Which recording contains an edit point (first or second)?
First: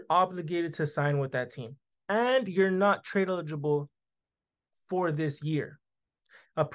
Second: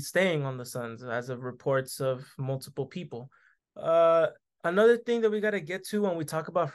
second